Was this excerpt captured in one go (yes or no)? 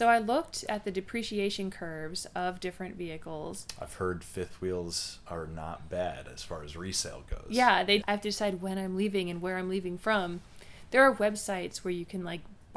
no